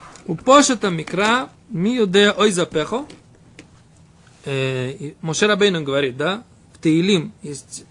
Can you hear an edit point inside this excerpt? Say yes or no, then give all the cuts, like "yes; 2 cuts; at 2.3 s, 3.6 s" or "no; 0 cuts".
no; 0 cuts